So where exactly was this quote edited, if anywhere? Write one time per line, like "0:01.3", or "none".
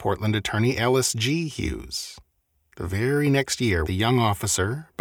0:03.8